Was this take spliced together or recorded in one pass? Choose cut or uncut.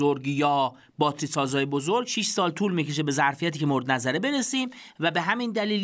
uncut